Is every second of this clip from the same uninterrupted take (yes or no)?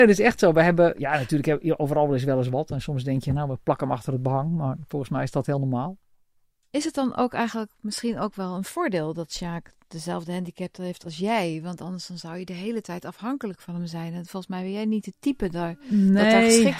yes